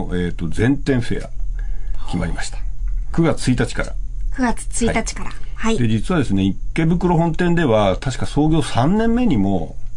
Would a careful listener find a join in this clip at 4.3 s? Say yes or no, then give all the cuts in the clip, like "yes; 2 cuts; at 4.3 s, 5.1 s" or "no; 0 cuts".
no; 0 cuts